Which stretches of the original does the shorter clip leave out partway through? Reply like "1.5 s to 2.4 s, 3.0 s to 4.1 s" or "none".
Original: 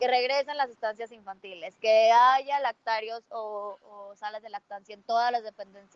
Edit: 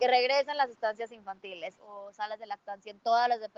1.8 s to 3.8 s